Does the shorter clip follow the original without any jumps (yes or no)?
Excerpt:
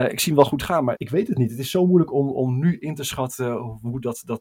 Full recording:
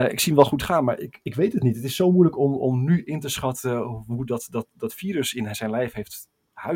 no